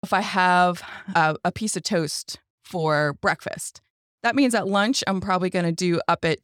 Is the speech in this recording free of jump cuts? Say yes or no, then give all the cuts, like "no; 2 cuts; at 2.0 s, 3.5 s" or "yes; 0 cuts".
yes; 0 cuts